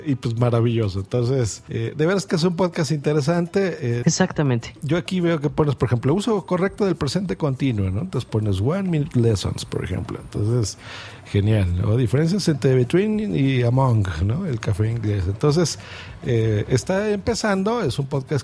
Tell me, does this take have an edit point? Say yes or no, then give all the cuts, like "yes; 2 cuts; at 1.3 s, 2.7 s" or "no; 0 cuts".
yes; 1 cut; at 4.0 s